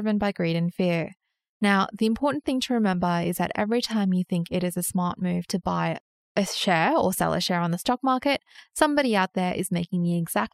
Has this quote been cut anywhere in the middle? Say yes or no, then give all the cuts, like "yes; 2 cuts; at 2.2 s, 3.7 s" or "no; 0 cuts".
no; 0 cuts